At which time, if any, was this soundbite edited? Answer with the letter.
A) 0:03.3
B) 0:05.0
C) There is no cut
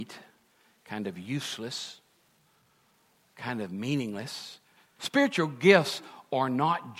B